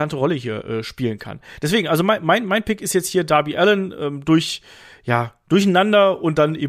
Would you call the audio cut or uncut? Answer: uncut